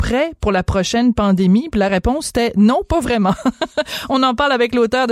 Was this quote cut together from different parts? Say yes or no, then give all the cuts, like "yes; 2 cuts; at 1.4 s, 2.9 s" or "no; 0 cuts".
no; 0 cuts